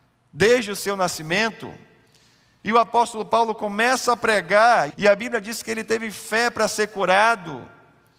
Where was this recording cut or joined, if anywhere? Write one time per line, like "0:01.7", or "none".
0:02.6
0:04.9